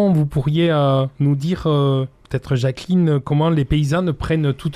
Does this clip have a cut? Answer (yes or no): no